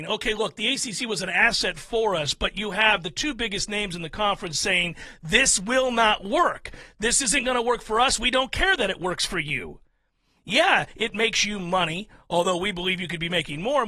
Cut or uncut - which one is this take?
uncut